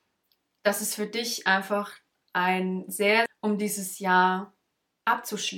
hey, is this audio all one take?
no; 1 cut; at 3.3 s

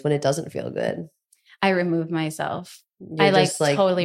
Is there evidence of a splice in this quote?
no; 0 cuts

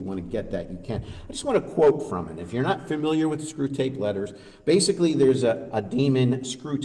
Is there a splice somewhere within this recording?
no; 0 cuts

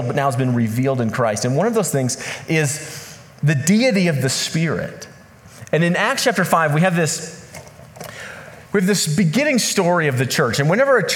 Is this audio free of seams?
no; 1 cut; at 8.6 s

